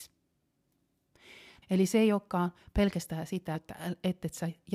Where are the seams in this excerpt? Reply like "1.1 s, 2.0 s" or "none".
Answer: 1.6 s, 3.5 s